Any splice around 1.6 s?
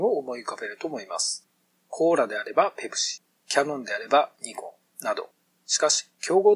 no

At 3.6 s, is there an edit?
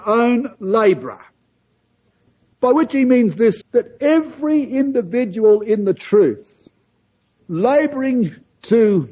yes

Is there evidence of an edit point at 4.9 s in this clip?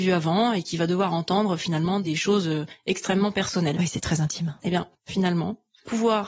yes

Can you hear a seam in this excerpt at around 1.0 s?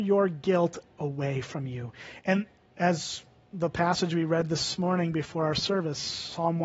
no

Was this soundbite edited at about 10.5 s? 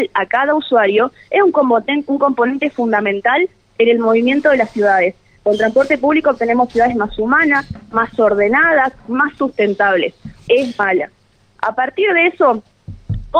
yes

